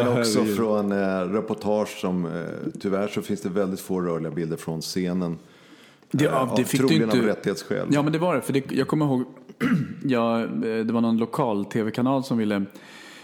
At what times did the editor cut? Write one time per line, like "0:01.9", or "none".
none